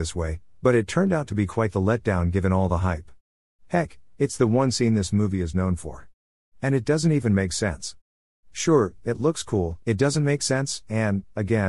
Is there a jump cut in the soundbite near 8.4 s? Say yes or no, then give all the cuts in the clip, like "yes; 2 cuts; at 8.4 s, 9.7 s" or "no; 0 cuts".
yes; 2 cuts; at 8.4 s, 9.8 s